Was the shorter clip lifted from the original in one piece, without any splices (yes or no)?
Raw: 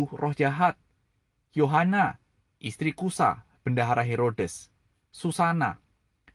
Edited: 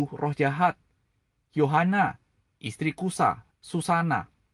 no